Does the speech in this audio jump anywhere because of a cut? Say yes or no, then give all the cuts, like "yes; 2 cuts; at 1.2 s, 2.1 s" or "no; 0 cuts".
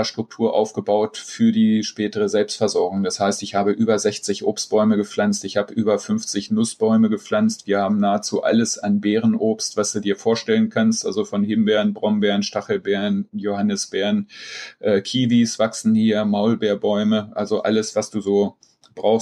no; 0 cuts